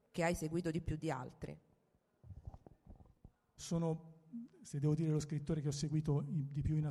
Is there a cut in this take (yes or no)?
yes